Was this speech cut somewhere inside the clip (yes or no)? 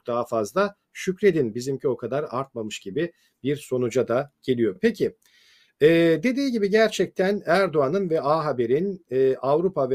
no